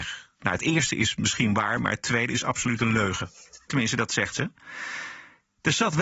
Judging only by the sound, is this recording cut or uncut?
cut